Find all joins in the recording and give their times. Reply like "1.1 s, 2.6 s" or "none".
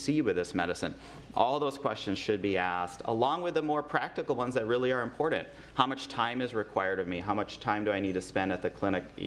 none